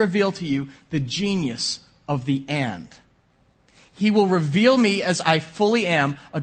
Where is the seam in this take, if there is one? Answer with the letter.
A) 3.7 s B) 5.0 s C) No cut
C